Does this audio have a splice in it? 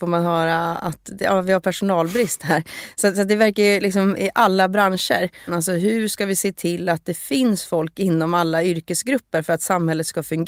yes; 1 cut; at 5.5 s

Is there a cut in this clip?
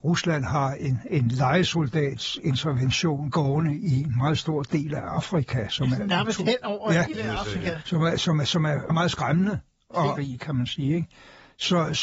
yes; 2 cuts; at 8.9 s, 10.2 s

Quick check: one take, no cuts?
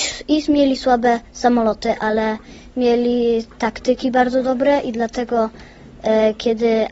yes; 0 cuts

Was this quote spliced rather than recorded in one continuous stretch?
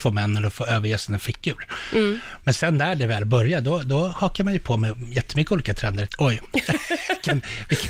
yes; 1 cut; at 6.1 s

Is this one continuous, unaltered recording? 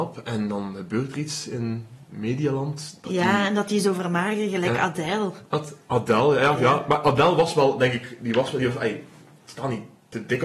yes; 0 cuts

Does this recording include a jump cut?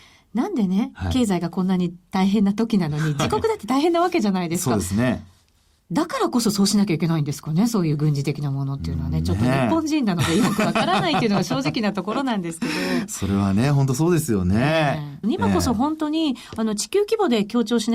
yes; 1 cut; at 15.2 s

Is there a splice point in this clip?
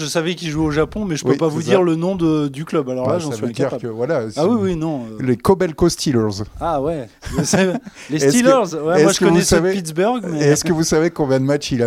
no; 0 cuts

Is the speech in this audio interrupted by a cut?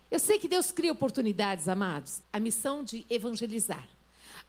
yes; 1 cut; at 2.2 s

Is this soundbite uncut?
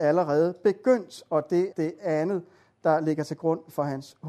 no; 1 cut; at 1.7 s

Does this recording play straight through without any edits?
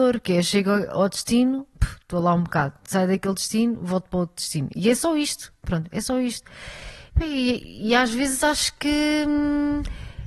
yes; 0 cuts

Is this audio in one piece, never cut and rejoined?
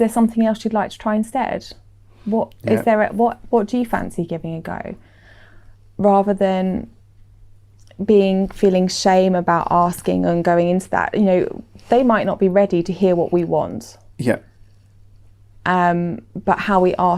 yes; 0 cuts

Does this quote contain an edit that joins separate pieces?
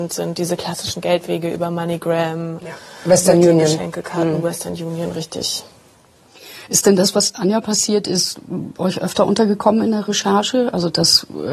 no; 0 cuts

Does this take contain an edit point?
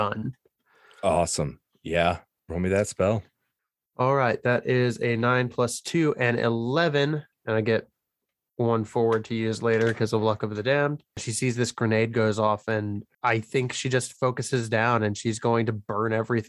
yes; 1 cut; at 11.1 s

